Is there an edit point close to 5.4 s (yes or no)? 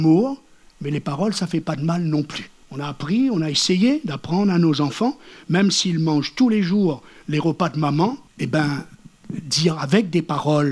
no